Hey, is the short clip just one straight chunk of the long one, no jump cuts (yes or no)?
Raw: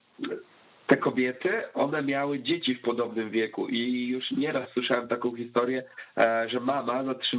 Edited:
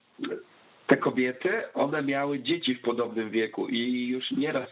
yes